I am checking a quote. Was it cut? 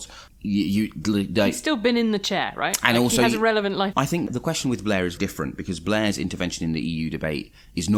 yes; 2 cuts; at 3.9 s, 5.2 s

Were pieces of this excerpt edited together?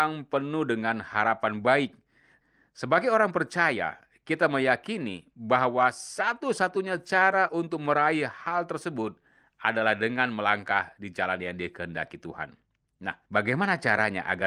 yes; 1 cut; at 13.3 s

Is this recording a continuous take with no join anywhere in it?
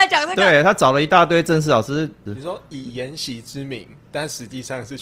no; 1 cut; at 2.2 s

